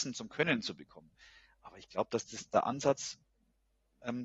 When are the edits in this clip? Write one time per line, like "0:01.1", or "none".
none